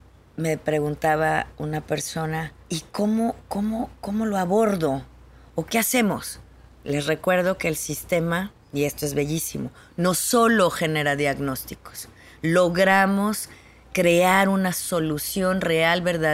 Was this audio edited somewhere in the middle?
yes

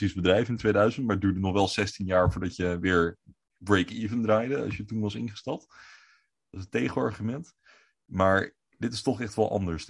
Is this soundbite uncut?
yes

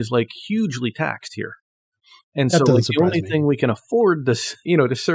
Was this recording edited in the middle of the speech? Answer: no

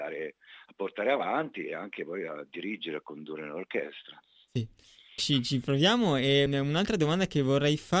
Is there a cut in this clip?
yes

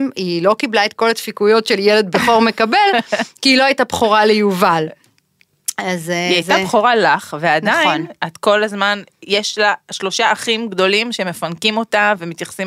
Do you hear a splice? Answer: no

